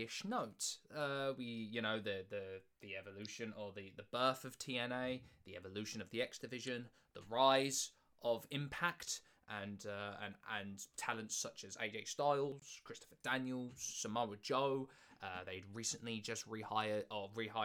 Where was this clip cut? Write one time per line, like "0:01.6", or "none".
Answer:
none